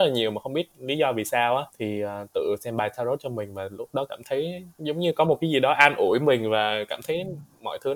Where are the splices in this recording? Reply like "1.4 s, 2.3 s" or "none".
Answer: 1.7 s, 4.7 s